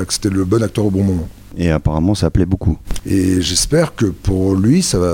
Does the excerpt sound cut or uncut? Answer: cut